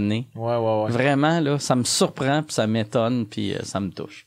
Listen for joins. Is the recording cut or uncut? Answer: uncut